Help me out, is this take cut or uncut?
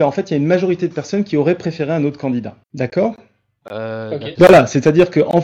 cut